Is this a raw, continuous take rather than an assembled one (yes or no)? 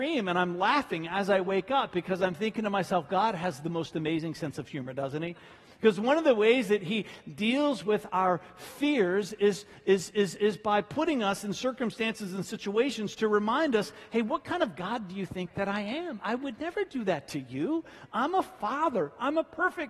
yes